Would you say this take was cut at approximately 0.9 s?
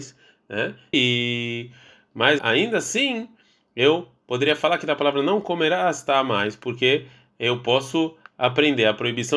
yes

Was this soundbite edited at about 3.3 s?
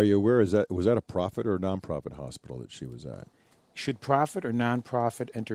no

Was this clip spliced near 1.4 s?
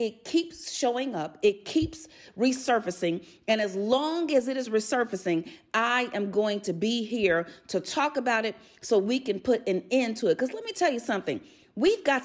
yes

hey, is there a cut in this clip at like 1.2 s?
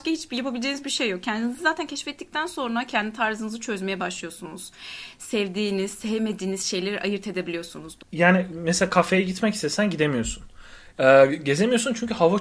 no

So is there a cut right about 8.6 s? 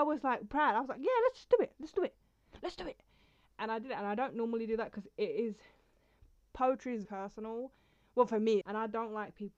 yes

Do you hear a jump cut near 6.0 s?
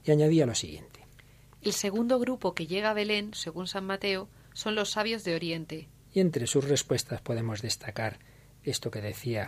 yes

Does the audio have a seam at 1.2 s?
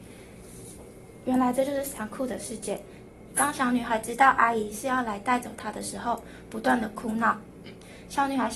yes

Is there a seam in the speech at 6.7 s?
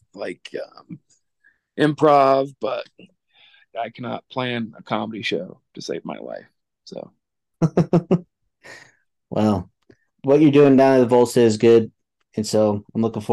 no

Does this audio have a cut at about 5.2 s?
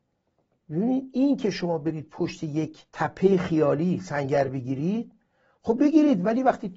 no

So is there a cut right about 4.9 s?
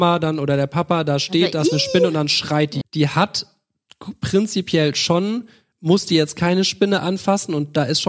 no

